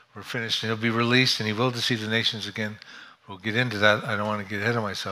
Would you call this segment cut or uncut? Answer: uncut